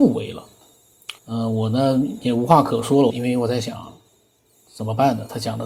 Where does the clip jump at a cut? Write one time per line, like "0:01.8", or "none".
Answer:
0:01.2
0:03.1